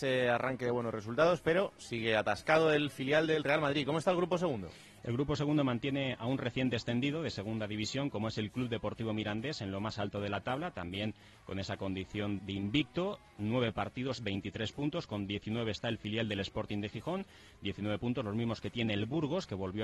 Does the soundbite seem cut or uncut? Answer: cut